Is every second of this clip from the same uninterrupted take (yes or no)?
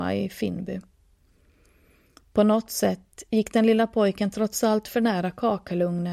yes